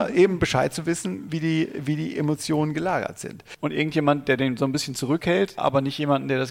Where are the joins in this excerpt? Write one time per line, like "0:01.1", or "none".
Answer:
0:03.5
0:05.6